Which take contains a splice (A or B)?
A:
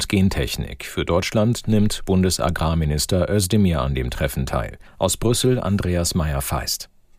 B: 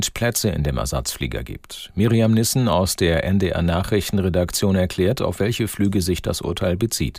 A